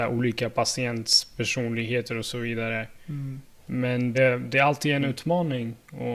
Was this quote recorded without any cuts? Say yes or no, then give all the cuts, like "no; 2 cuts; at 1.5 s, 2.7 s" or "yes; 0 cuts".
no; 1 cut; at 4.1 s